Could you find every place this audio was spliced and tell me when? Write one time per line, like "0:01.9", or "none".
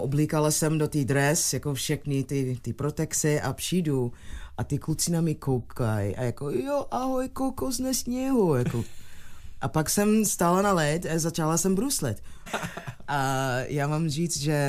0:12.5